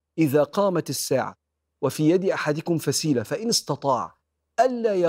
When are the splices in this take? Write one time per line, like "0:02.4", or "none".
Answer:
none